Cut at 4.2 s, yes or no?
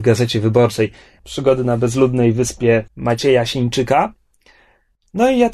no